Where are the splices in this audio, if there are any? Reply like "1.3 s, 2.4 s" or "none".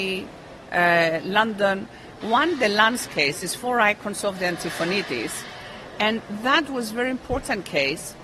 2.2 s